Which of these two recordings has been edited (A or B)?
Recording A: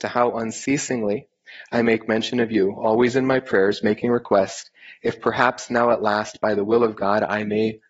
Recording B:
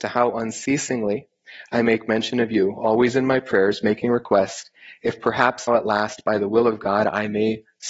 B